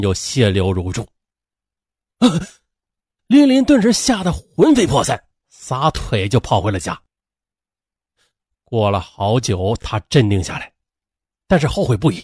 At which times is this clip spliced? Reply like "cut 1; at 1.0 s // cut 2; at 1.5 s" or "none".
cut 1; at 3.2 s